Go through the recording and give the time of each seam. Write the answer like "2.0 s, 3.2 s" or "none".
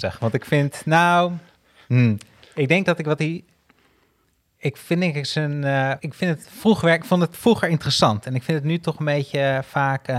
6.0 s

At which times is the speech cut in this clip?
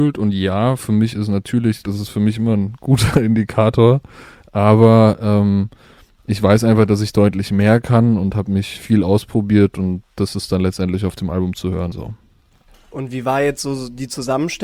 1.8 s, 11.9 s

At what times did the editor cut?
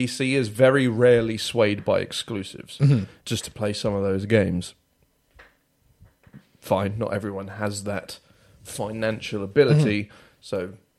3.2 s

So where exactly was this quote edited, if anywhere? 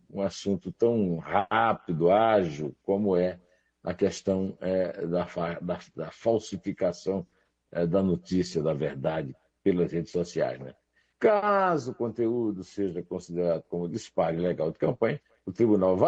none

